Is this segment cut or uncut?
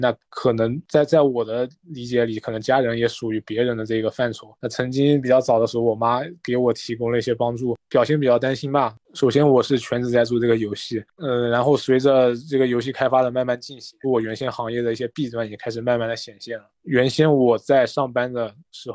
cut